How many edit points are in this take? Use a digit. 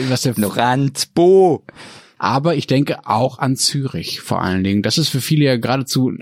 1